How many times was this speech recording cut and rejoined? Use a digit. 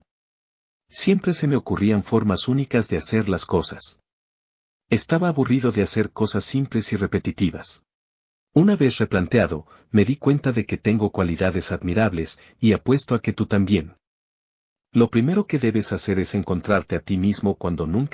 2